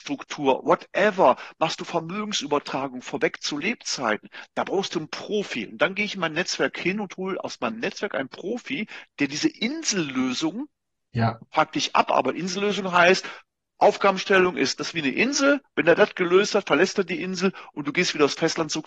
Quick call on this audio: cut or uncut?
cut